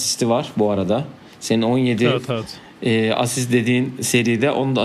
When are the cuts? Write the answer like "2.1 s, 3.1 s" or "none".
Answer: none